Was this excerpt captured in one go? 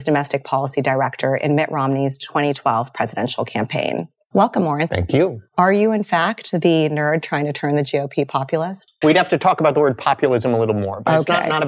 no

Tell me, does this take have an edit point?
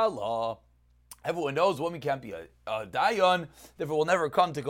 no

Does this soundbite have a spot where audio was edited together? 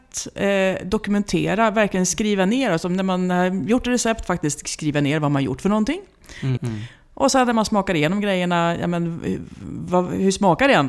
yes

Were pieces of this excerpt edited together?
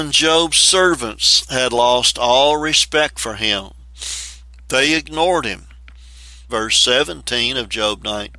yes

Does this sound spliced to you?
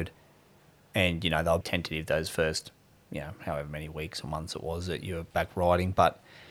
yes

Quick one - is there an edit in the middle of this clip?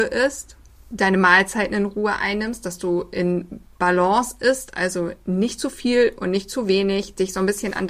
no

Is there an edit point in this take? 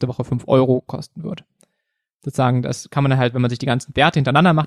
no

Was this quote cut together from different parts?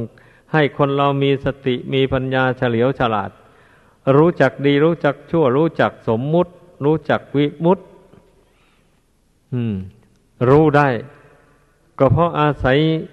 no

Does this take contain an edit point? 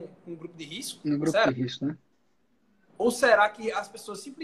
no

